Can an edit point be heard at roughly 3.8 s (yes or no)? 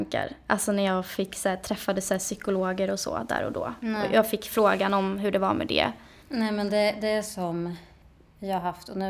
no